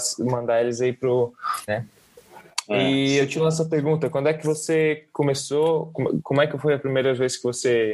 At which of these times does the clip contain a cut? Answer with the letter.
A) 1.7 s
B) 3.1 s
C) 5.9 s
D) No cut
A